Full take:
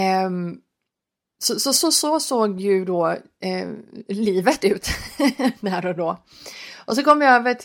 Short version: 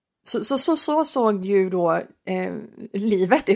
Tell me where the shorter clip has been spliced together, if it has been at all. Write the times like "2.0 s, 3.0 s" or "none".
none